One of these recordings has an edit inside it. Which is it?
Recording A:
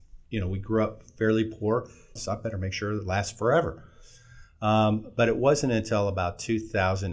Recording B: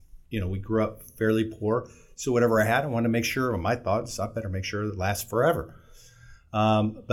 A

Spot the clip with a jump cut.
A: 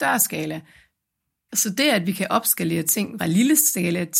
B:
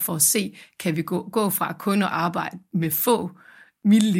A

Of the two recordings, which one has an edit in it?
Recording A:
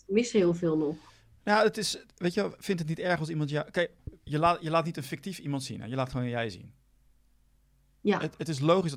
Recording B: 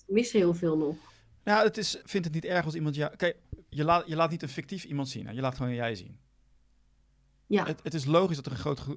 B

